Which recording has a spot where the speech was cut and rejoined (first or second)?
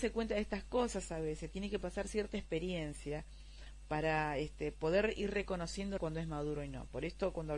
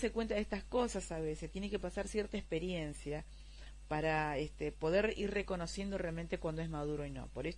first